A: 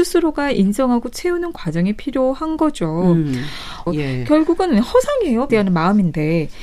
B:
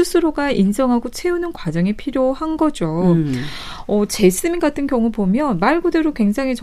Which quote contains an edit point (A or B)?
A